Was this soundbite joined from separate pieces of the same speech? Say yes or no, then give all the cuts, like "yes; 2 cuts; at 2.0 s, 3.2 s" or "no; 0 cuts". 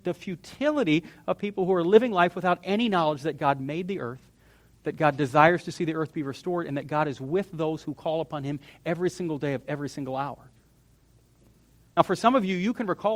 no; 0 cuts